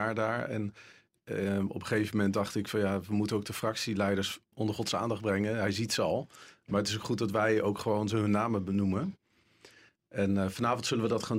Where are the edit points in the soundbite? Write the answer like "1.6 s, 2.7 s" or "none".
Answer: 4.5 s